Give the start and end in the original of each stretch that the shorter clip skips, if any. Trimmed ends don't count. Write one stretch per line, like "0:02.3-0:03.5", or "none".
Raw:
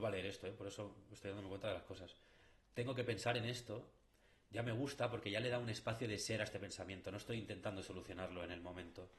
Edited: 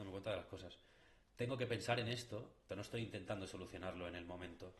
0:04.1-0:07.0